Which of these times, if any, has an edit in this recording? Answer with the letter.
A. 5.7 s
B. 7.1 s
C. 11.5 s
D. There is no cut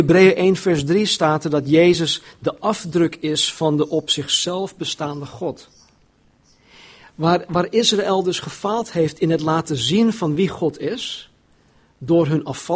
D